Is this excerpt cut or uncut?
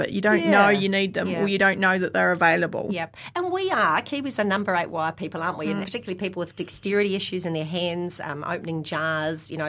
cut